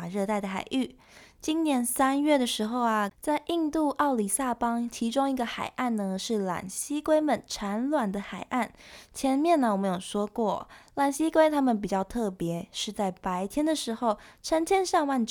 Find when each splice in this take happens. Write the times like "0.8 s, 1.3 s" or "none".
3.1 s